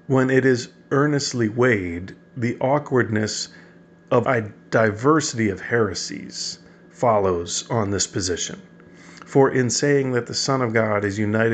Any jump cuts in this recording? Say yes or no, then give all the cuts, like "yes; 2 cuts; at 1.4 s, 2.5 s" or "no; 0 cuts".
yes; 1 cut; at 4.2 s